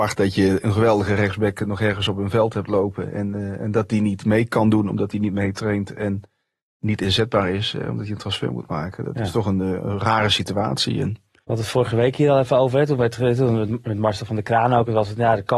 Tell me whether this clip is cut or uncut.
uncut